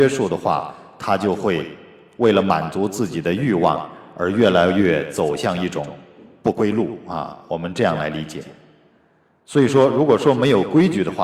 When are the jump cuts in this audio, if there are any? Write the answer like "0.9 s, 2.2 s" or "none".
none